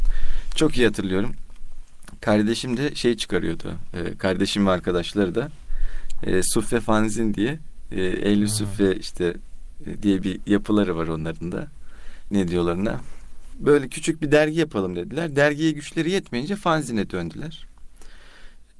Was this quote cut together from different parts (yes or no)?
no